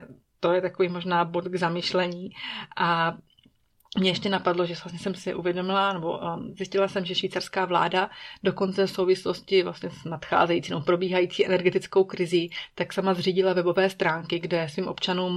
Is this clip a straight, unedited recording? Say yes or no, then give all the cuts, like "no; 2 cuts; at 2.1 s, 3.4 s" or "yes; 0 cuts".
yes; 0 cuts